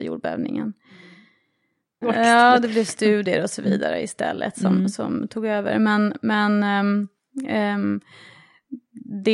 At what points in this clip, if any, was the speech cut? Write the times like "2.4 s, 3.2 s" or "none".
2.0 s